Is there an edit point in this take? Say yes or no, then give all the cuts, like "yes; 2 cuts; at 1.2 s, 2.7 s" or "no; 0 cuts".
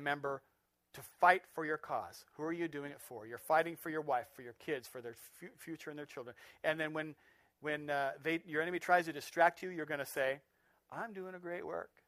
no; 0 cuts